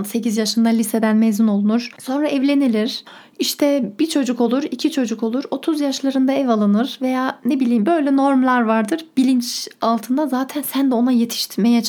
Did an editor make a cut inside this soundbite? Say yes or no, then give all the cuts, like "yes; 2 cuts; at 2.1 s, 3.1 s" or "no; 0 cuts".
yes; 1 cut; at 2.0 s